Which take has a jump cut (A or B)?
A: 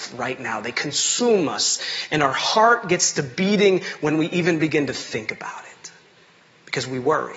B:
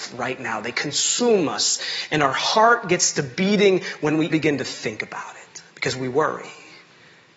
B